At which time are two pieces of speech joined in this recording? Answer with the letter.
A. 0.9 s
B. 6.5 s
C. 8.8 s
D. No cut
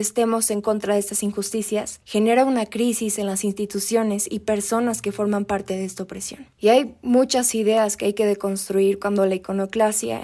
B